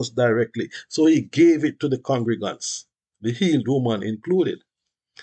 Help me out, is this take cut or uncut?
uncut